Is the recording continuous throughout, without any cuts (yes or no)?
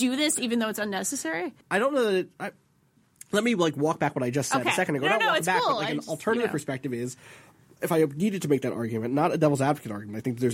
no